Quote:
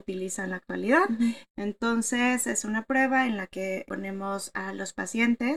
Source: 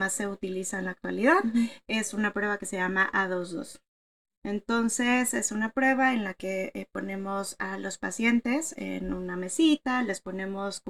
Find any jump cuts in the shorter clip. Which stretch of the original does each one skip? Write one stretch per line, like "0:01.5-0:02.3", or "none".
0:01.8-0:04.3
0:06.7-0:06.9